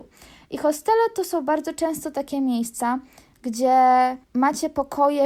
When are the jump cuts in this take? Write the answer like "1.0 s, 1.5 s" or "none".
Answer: 4.2 s